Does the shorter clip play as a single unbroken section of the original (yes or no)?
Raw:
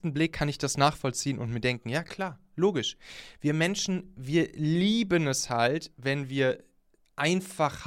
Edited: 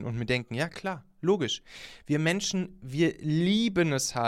yes